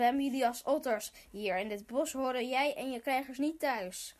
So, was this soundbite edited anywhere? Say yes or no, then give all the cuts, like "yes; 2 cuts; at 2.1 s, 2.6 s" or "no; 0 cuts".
no; 0 cuts